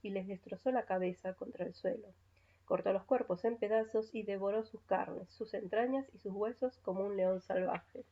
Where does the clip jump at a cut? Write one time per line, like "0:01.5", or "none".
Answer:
none